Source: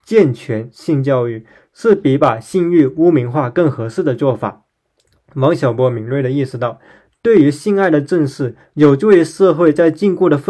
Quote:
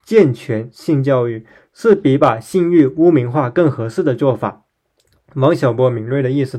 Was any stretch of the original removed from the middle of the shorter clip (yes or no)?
no